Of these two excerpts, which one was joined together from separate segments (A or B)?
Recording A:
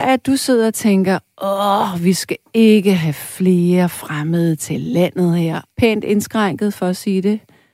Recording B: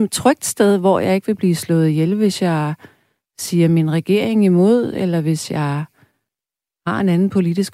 A